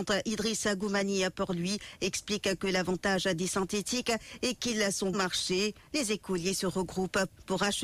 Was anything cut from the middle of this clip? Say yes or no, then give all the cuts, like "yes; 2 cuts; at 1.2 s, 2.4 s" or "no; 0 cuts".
yes; 1 cut; at 5.1 s